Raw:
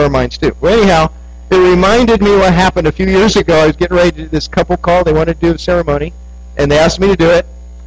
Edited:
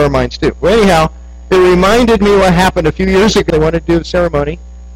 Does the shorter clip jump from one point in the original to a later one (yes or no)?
yes